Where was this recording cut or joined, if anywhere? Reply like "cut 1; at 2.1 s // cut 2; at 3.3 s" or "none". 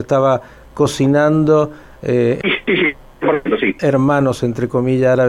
cut 1; at 2.4 s // cut 2; at 3.8 s